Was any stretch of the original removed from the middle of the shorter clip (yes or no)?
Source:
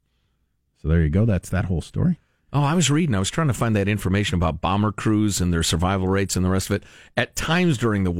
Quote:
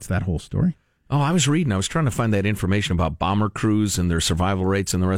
no